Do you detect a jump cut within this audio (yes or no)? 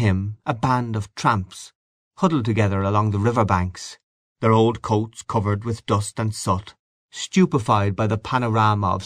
no